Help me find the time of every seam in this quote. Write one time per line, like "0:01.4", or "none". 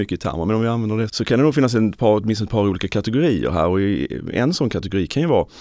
0:01.1